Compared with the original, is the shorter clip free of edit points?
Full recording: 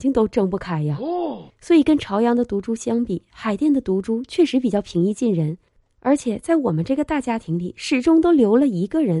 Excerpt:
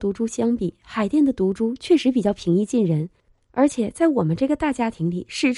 yes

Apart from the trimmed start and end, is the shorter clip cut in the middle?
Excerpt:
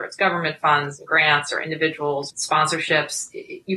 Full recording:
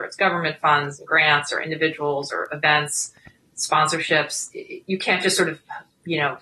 yes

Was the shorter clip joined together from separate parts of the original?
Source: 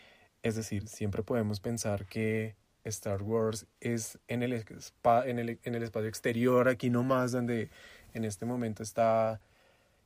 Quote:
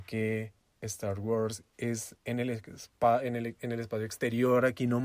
no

